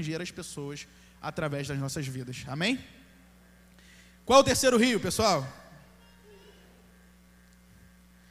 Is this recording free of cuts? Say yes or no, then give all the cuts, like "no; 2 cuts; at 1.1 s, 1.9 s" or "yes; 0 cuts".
yes; 0 cuts